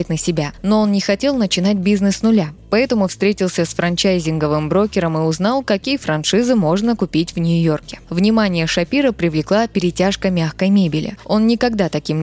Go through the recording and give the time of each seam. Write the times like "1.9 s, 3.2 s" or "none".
none